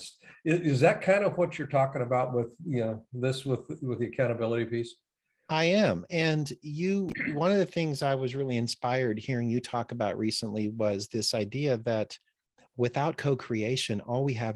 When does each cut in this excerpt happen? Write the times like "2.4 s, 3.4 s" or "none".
none